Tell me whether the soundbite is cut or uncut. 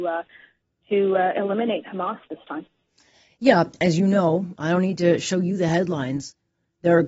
cut